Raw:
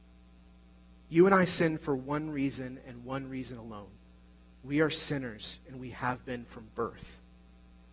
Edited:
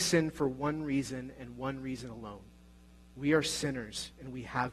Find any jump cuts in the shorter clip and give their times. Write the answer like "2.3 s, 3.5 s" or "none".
none